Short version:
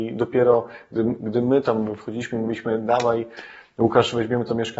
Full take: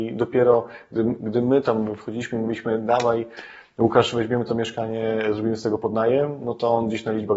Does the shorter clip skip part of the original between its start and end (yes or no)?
no